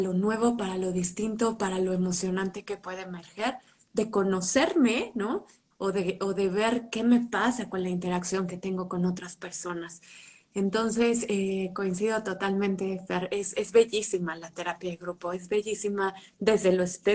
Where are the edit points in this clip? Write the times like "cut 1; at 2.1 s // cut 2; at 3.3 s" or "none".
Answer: cut 1; at 5.7 s